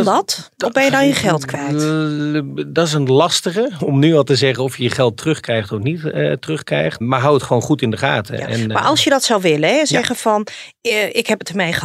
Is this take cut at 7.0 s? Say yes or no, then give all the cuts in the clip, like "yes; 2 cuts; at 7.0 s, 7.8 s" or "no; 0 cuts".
yes; 2 cuts; at 3.8 s, 7.0 s